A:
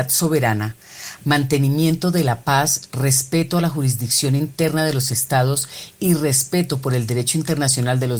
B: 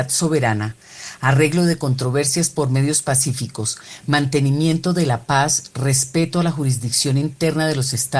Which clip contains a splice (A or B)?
A